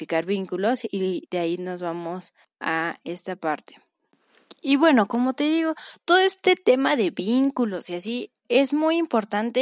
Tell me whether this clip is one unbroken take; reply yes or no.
yes